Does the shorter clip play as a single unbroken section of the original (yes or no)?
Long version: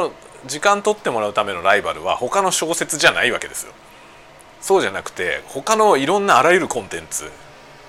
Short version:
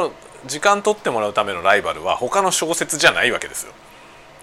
yes